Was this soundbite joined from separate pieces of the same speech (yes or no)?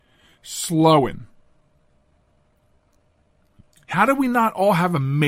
no